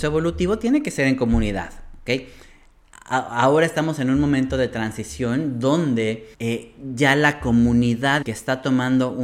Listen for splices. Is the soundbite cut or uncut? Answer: cut